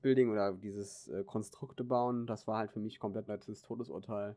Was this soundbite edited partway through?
yes; 1 cut; at 3.3 s

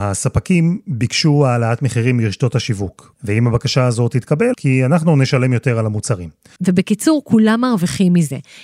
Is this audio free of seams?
no; 3 cuts; at 3.1 s, 4.5 s, 6.6 s

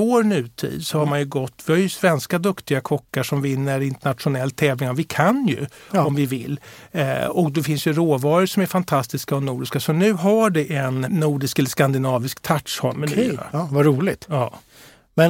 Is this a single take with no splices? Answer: no; 1 cut; at 11.1 s

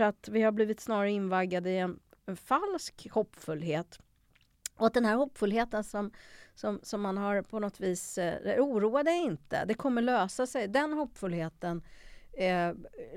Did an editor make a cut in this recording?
no; 0 cuts

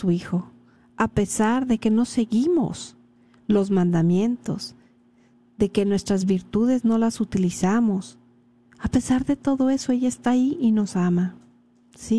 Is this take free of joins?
yes; 0 cuts

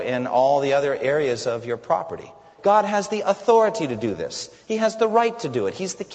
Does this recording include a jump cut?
yes; 1 cut; at 2.6 s

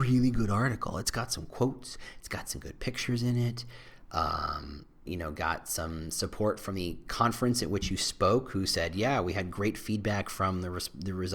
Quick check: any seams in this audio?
yes; 1 cut; at 5.1 s

